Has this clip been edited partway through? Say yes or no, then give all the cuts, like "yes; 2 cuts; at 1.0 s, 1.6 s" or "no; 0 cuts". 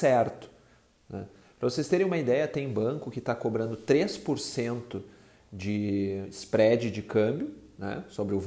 no; 0 cuts